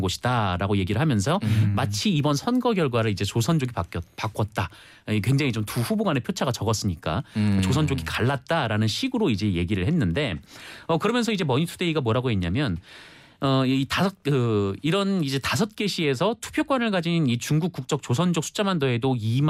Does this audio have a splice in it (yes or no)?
no